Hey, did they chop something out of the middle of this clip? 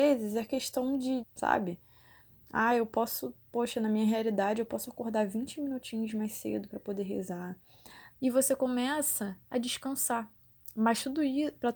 yes; 3 cuts; at 1.2 s, 8.1 s, 9.4 s

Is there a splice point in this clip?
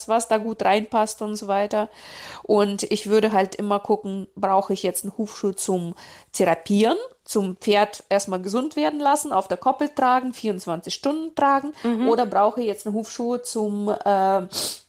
no; 0 cuts

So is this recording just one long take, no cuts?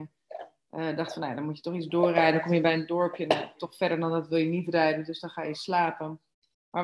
yes; 0 cuts

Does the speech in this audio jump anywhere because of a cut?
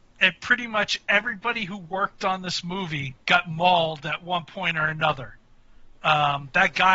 yes; 2 cuts; at 3.2 s, 5.9 s

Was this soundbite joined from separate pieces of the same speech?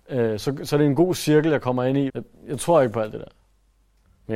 yes; 1 cut; at 2.1 s

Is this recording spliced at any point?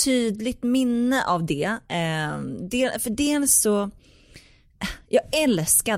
no; 0 cuts

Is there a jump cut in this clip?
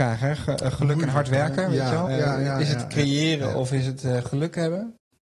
yes; 1 cut; at 2.1 s

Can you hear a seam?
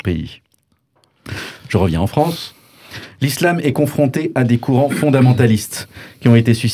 no; 0 cuts

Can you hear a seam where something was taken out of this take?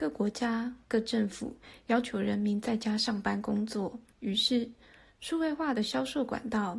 yes; 1 cut; at 4.1 s

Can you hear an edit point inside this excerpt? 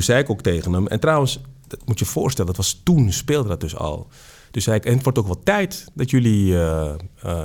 no; 0 cuts

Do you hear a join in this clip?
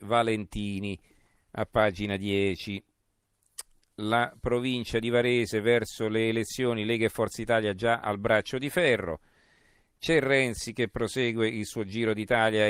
no; 0 cuts

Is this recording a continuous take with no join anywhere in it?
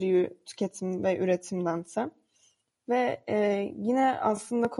yes; 0 cuts

